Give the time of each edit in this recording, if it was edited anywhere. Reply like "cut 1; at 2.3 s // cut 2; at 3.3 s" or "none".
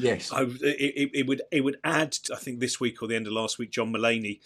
cut 1; at 2.3 s